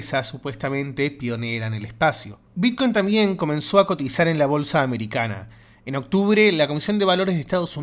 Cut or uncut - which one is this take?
uncut